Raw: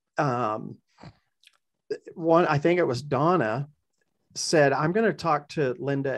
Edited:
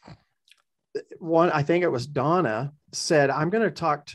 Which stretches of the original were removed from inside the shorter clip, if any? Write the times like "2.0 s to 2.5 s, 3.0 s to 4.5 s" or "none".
3.8 s to 4.2 s